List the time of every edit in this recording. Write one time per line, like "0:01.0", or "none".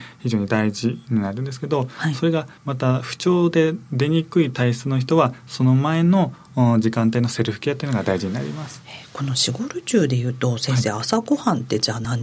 none

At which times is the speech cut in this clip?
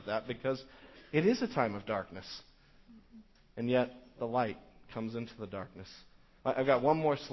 0:06.4

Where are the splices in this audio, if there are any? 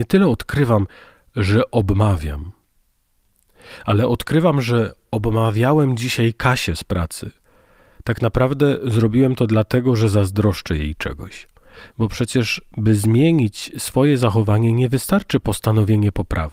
0:11.9

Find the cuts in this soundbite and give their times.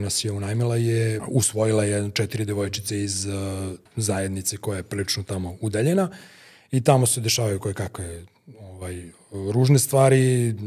0:01.2
0:03.9

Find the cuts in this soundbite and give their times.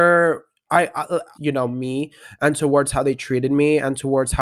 0:01.3

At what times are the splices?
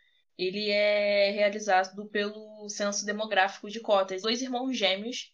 0:04.2

